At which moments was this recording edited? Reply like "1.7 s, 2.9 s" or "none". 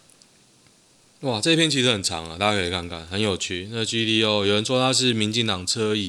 none